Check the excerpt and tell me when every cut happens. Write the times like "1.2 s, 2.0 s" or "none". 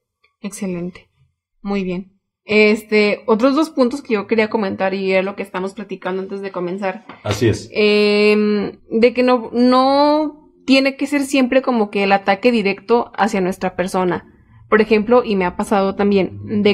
8.8 s